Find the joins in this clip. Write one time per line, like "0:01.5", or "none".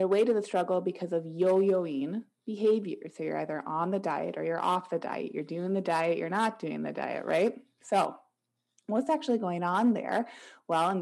none